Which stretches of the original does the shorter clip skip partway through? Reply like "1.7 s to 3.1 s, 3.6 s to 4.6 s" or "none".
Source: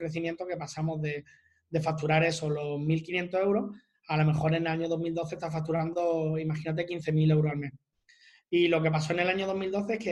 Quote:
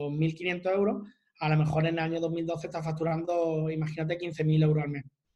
none